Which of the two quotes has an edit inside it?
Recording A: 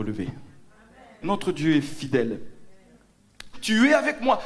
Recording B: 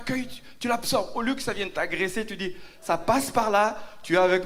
A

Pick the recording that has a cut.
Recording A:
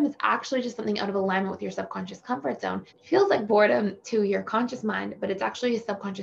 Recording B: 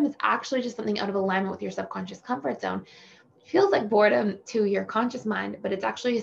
A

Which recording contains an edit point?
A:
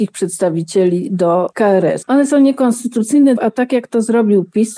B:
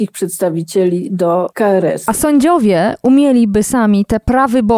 A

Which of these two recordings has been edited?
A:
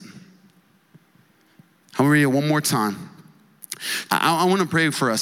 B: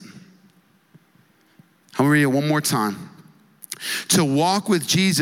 A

